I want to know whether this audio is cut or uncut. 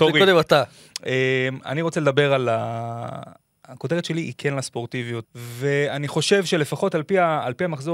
cut